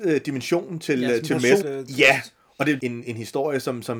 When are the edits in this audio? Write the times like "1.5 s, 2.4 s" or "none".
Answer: 1.6 s, 2.8 s

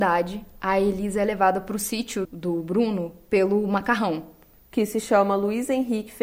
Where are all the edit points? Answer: 2.2 s

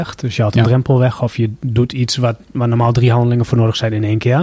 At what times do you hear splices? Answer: none

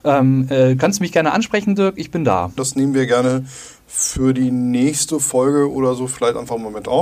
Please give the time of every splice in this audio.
2.6 s

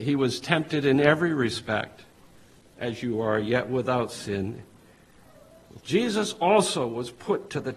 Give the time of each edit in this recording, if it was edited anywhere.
5.8 s

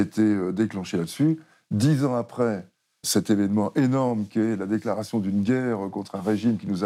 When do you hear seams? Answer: 3.0 s

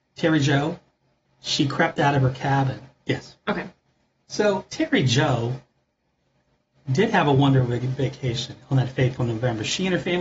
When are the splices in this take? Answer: 1.3 s, 3.0 s

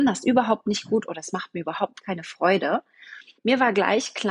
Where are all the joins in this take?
3.4 s

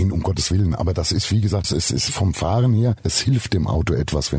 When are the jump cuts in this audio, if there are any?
1.6 s

